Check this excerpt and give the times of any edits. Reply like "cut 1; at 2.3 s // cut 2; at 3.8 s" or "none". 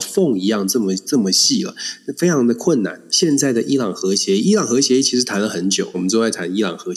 cut 1; at 3.1 s // cut 2; at 5.9 s